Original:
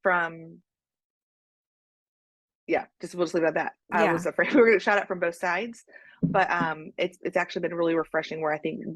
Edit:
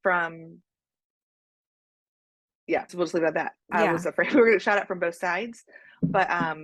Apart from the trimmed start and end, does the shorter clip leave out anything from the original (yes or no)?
yes